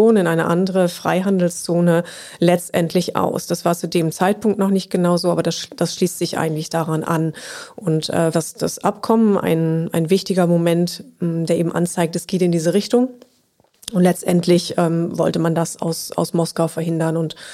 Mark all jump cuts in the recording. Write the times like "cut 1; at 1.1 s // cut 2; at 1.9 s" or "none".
cut 1; at 8.3 s